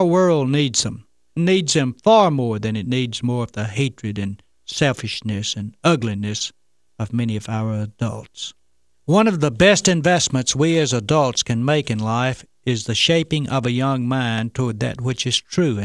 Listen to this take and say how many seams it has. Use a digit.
0